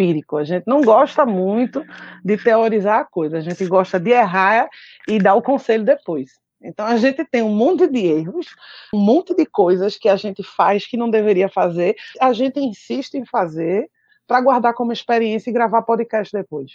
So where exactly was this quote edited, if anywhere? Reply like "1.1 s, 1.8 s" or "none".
8.9 s, 12.1 s